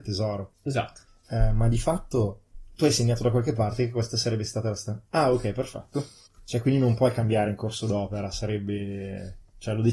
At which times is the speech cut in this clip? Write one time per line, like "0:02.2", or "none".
none